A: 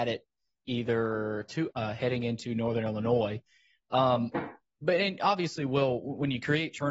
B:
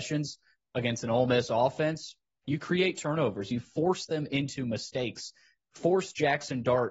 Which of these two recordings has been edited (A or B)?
A